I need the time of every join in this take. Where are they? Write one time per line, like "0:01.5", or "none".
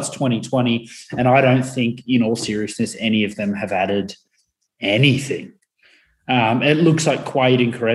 none

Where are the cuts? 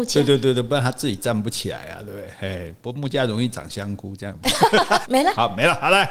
0:05.0

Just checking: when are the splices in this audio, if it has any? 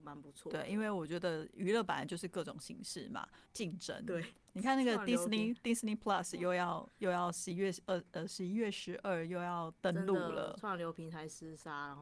0:03.5

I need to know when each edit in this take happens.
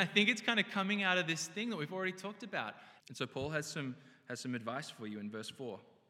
0:03.0

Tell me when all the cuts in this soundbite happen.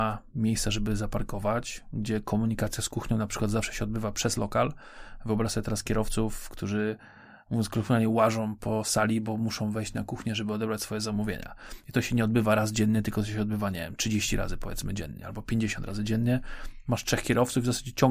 none

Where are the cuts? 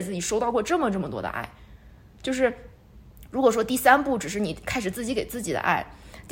none

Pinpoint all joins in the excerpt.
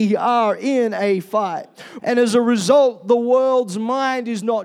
0:02.0

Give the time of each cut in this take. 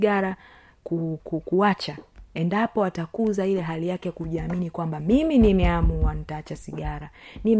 0:01.2

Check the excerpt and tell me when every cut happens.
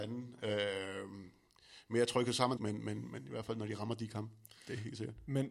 0:02.6

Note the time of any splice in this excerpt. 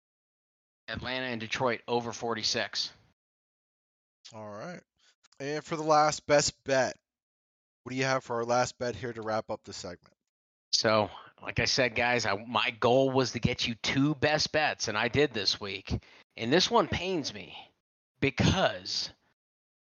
none

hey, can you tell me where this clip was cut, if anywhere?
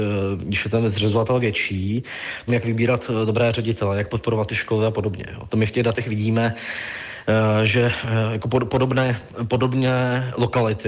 0:02.5

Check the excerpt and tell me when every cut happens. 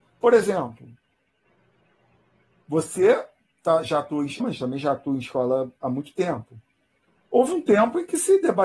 0:04.4

